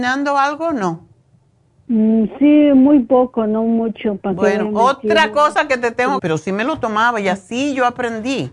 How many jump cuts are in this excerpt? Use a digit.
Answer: 1